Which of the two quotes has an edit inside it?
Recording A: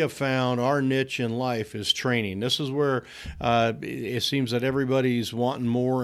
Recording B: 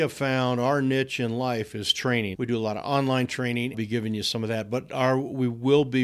B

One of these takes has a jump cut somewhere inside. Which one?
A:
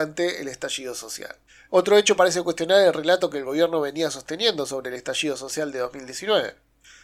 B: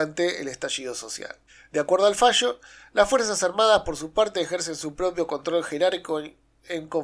A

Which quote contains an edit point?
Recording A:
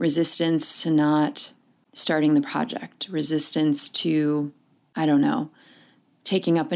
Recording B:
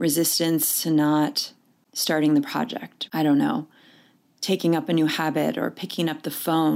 B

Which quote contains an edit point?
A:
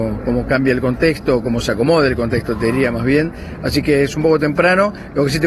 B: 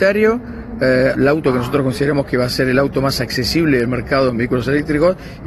B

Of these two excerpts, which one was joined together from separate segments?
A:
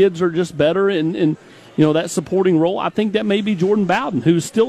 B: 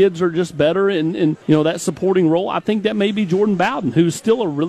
B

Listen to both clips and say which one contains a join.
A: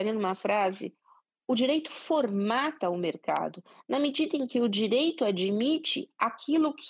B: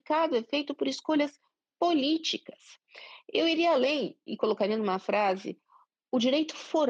B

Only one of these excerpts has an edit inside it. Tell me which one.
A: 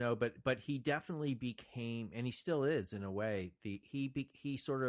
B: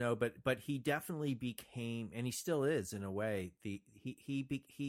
A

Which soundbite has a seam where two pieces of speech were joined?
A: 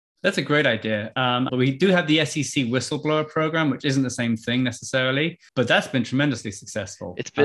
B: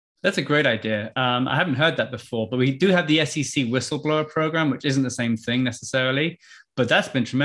A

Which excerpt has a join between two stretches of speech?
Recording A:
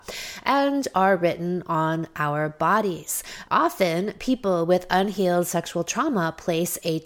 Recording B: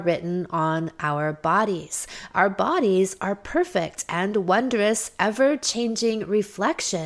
A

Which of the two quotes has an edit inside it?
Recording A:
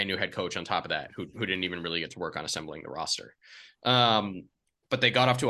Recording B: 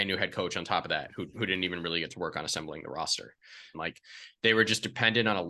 B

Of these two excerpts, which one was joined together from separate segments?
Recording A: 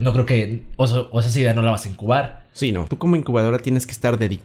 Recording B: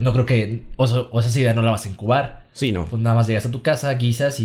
A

